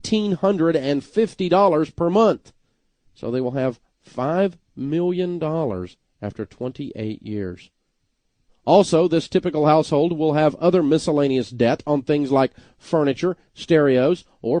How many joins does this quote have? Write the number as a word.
two